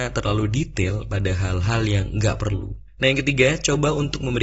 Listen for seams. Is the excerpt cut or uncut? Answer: cut